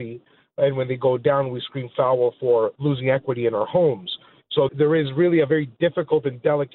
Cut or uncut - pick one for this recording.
cut